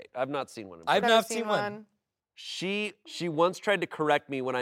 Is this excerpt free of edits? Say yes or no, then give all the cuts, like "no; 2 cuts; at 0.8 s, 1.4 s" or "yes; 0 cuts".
no; 1 cut; at 3.0 s